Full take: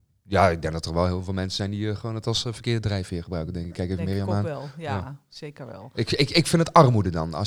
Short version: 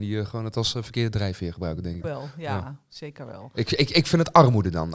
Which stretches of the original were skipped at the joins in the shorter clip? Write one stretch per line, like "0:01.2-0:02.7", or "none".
0:03.7-0:04.4

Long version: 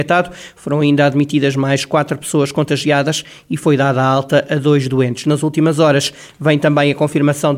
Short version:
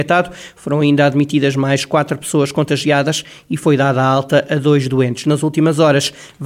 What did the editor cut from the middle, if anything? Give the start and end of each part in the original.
none

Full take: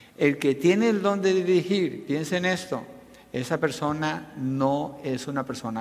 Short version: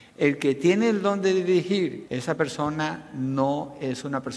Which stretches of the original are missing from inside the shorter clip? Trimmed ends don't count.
0:02.0-0:03.3

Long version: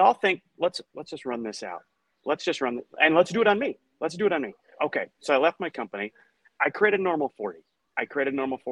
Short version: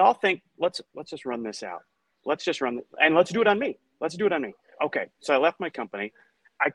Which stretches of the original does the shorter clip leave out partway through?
none

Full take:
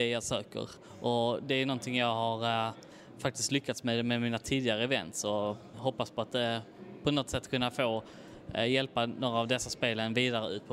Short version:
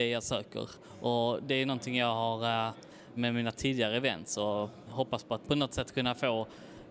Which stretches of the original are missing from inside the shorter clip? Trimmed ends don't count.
0:03.2-0:04.0
0:06.3-0:07.0

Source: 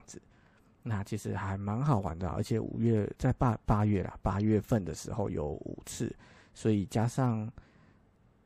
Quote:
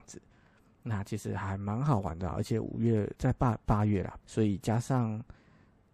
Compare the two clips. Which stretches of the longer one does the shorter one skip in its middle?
0:04.2-0:06.5

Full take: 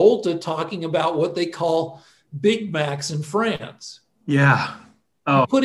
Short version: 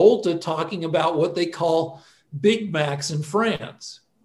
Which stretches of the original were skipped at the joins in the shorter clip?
none

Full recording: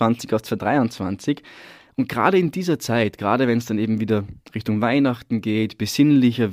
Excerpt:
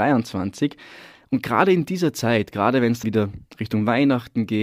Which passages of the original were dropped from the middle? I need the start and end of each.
0:03.7-0:04.0

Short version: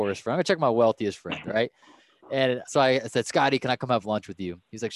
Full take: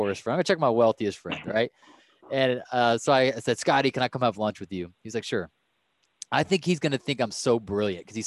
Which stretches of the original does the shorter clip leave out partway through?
0:02.7-0:03.0

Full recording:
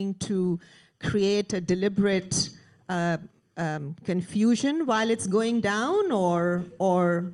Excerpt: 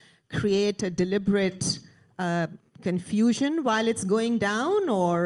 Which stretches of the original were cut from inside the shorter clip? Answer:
0:03.4-0:04.0

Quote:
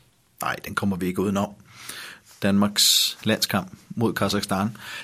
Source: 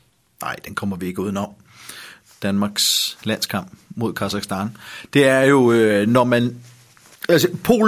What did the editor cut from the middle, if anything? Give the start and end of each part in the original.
none

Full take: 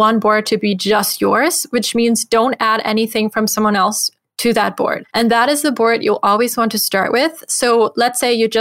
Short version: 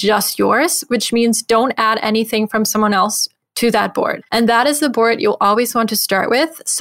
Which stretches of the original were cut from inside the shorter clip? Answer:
none

